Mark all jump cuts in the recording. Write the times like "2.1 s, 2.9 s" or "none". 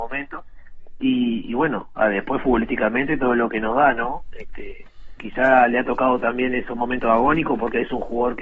none